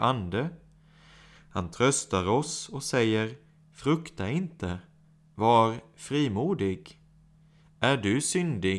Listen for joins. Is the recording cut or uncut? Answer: uncut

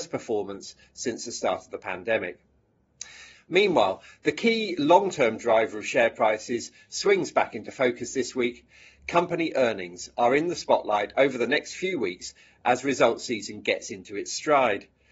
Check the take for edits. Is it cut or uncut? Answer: cut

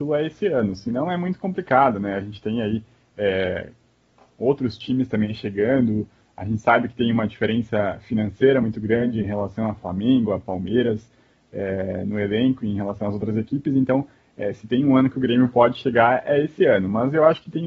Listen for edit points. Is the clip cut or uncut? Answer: uncut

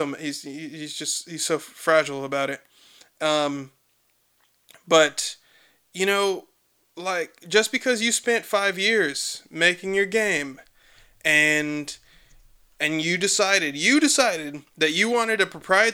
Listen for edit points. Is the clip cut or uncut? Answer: uncut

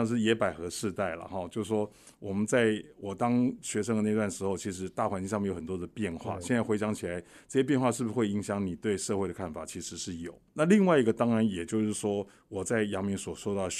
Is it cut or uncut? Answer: uncut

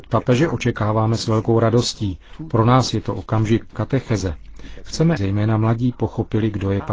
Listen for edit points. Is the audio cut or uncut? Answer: cut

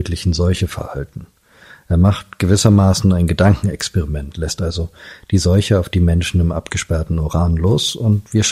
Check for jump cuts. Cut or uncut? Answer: uncut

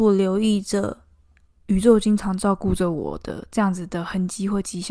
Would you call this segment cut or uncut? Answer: uncut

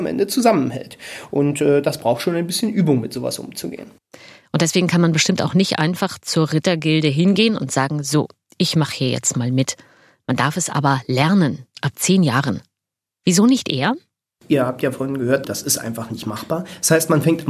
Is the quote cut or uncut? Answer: cut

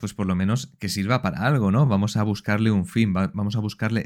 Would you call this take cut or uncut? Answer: uncut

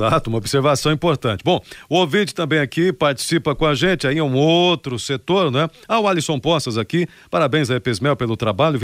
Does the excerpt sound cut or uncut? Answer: uncut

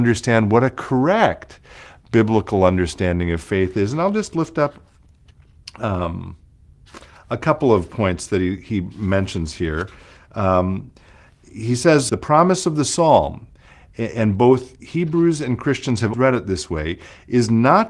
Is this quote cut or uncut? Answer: cut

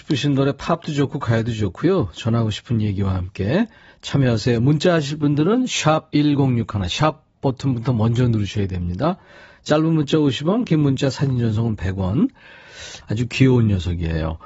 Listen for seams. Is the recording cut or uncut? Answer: cut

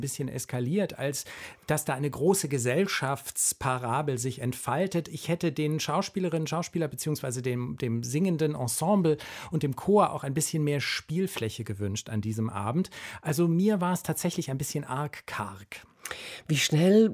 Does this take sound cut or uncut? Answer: uncut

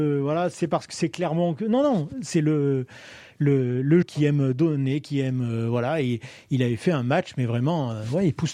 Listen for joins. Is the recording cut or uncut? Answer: cut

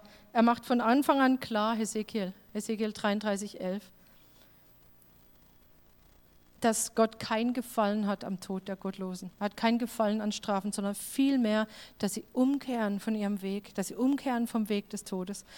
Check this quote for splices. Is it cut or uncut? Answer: cut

